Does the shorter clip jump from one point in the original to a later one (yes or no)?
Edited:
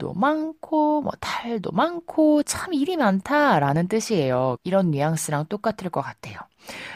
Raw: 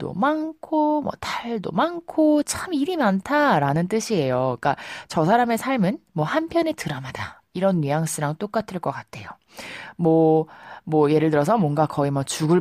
yes